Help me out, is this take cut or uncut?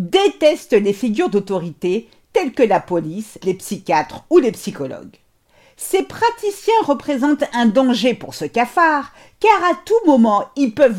cut